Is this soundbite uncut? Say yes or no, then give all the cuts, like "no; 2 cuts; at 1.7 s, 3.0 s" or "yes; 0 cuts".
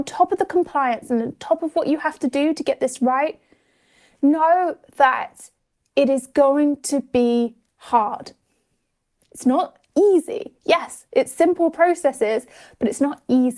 yes; 0 cuts